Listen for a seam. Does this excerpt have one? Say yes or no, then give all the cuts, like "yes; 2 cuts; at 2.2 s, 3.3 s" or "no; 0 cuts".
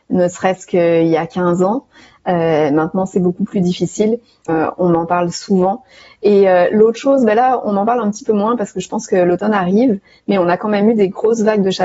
yes; 1 cut; at 4.5 s